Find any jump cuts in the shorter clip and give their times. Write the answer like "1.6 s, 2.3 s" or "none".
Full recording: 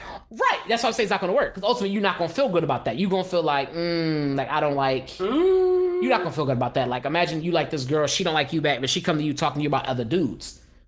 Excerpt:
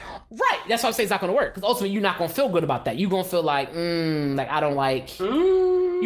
none